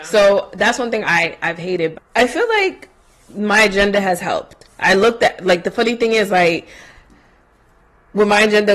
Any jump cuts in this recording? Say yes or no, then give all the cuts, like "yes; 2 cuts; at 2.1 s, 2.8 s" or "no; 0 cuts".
yes; 1 cut; at 1.9 s